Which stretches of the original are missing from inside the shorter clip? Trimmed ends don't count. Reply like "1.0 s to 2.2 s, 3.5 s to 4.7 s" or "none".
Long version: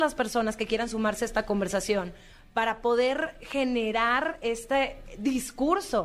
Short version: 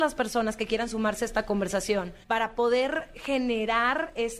2.2 s to 2.5 s